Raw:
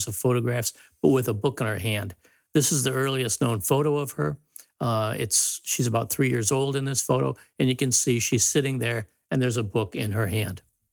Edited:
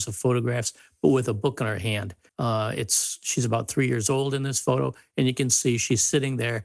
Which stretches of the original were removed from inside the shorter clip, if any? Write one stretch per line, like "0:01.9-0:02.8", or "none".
0:02.3-0:04.7